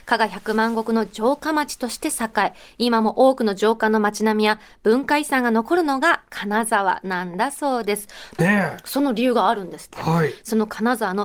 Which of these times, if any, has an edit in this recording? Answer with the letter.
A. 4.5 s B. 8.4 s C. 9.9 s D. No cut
B